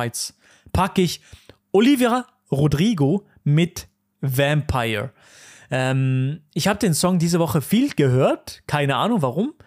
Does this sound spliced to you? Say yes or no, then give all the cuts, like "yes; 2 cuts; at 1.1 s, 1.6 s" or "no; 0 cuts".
no; 0 cuts